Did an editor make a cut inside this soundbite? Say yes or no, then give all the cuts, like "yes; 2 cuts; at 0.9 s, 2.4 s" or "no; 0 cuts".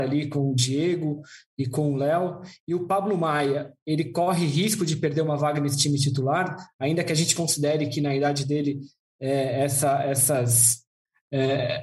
no; 0 cuts